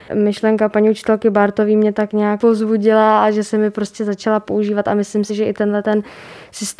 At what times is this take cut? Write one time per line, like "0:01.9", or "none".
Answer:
none